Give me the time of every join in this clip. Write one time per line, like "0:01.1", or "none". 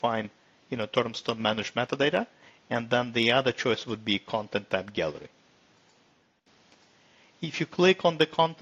none

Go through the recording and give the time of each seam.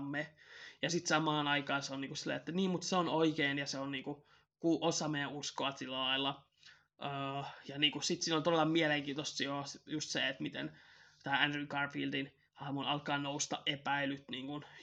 none

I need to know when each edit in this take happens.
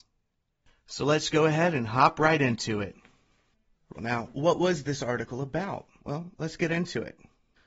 0:03.9
0:06.0

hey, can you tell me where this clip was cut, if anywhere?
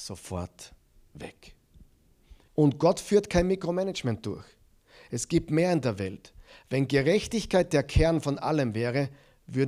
0:02.5

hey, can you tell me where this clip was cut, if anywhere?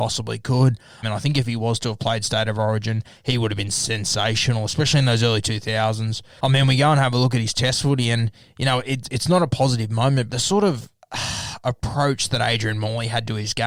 0:01.0
0:06.4
0:10.3

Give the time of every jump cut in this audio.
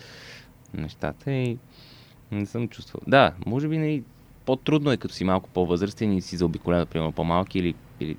none

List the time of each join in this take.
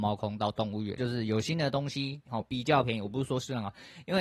0:01.0
0:02.2

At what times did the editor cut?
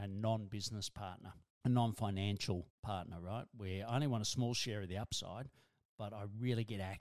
none

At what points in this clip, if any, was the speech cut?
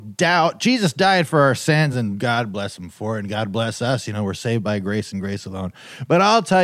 none

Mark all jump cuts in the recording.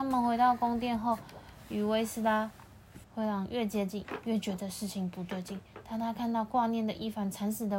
0:03.0

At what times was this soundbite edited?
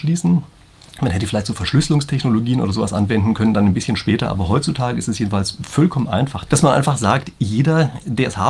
0:06.5

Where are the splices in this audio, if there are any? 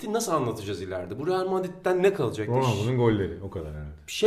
none

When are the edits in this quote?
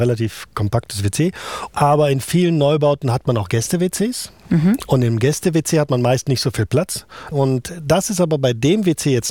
0:01.7
0:07.3

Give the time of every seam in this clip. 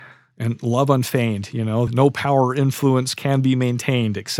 0:01.9

